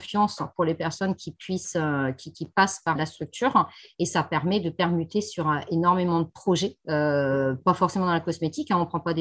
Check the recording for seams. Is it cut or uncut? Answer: cut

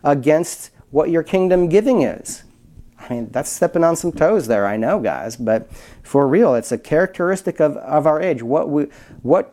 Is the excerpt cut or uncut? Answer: uncut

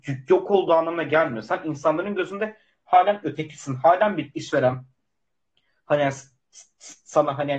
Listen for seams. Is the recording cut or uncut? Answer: uncut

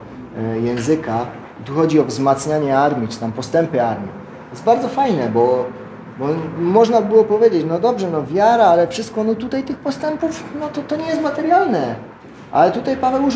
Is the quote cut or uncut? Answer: uncut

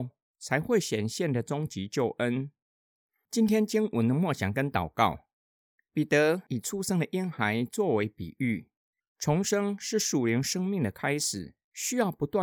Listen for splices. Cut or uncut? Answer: cut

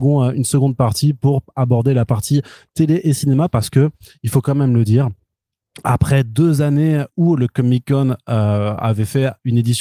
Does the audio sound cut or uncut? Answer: uncut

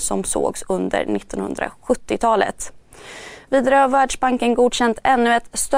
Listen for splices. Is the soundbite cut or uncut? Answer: uncut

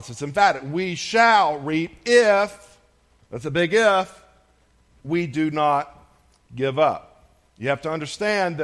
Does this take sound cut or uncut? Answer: uncut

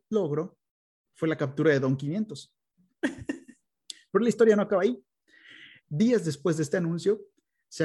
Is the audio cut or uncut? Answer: cut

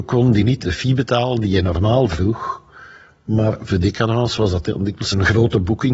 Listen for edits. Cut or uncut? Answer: uncut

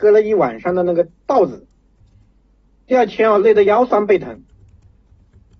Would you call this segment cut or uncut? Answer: uncut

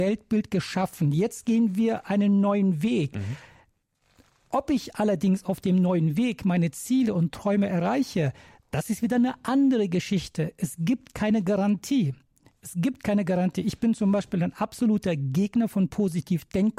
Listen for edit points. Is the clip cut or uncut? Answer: uncut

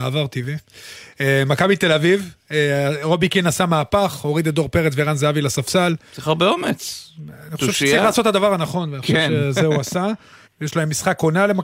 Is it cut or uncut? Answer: cut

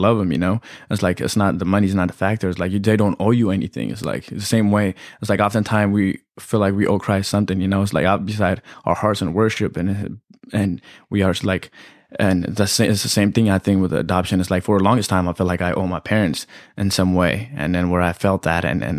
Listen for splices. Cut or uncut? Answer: uncut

